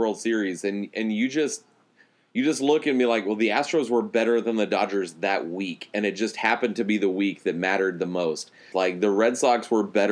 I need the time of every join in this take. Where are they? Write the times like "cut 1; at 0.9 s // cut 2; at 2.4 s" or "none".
cut 1; at 8.7 s